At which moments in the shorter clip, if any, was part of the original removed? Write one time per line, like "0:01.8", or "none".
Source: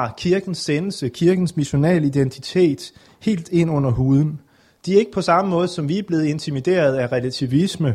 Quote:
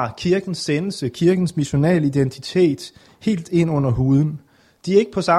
none